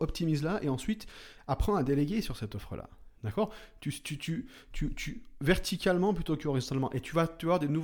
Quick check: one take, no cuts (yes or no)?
no